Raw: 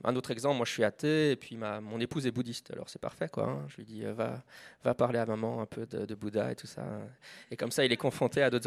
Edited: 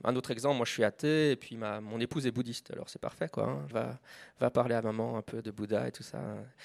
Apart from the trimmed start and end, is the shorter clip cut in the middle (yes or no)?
yes